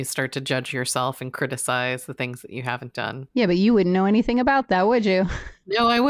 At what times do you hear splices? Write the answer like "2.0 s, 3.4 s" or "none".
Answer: none